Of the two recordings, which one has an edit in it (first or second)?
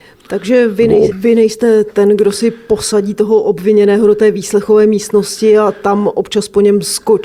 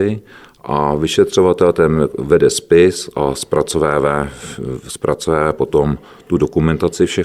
first